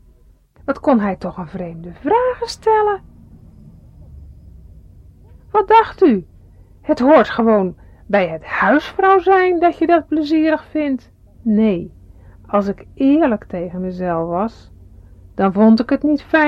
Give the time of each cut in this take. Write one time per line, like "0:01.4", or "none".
0:11.3